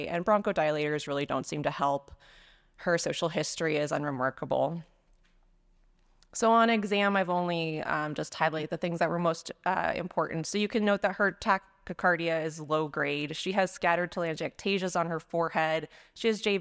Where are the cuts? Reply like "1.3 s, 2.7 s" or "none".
none